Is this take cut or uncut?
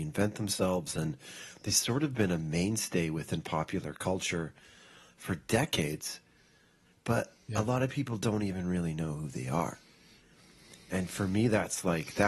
uncut